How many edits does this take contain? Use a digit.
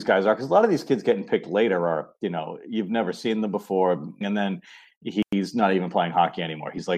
1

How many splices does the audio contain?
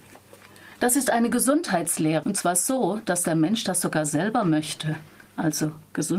1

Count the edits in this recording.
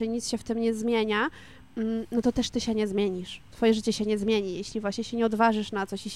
0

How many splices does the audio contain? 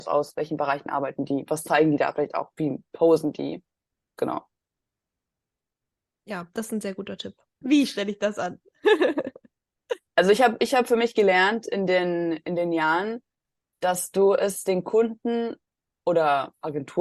1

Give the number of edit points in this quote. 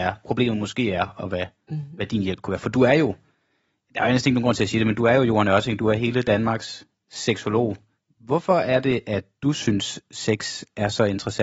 0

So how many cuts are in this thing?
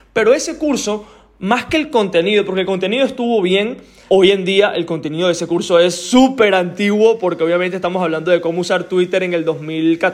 1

